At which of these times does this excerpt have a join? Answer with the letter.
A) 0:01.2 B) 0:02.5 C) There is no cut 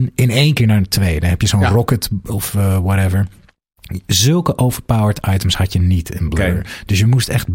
C